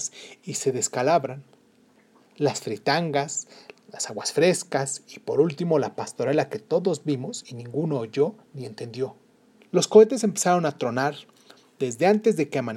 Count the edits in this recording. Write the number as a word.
one